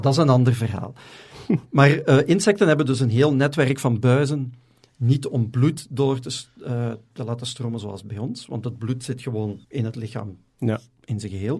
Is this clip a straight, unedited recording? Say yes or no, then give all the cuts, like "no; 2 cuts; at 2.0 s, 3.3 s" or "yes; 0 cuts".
no; 1 cut; at 9.6 s